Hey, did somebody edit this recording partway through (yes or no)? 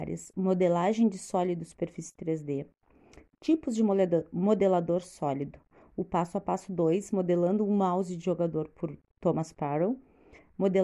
no